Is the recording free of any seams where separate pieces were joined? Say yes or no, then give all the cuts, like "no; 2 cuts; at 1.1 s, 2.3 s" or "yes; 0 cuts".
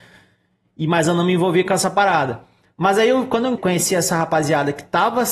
no; 1 cut; at 3.6 s